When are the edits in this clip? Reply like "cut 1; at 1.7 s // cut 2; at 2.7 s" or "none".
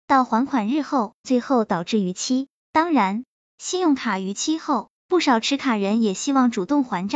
cut 1; at 1.2 s